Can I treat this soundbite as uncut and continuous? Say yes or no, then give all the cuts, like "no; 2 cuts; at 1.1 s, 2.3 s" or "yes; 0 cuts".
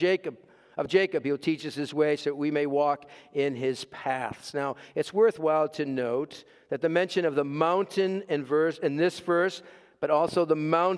yes; 0 cuts